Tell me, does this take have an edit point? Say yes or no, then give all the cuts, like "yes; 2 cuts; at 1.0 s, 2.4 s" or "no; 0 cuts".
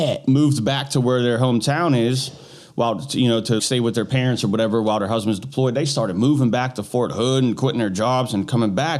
yes; 1 cut; at 3.6 s